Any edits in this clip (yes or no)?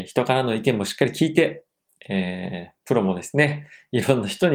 no